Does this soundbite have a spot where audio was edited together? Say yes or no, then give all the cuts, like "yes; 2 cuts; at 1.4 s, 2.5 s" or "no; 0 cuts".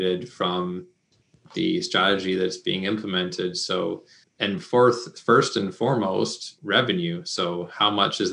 yes; 2 cuts; at 4.2 s, 6.6 s